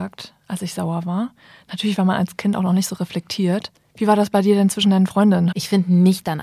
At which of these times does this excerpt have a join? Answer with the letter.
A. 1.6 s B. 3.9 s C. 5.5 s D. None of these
C